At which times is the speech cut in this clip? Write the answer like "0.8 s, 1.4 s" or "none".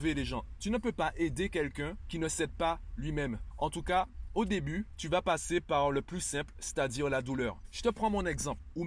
3.5 s